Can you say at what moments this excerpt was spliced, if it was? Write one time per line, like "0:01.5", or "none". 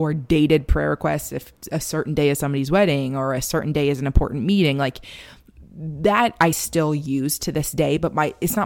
none